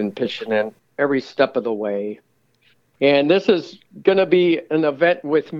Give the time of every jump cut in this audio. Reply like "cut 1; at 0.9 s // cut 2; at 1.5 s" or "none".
none